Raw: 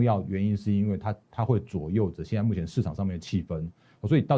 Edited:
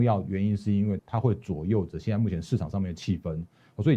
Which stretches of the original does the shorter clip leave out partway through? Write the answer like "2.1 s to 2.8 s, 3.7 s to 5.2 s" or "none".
1.0 s to 1.2 s